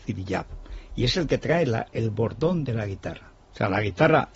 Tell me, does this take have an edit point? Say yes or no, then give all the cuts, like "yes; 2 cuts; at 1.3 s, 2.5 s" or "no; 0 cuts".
yes; 1 cut; at 3.4 s